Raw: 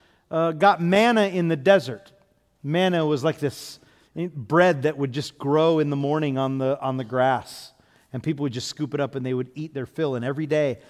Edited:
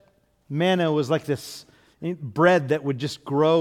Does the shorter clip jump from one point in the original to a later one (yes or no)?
no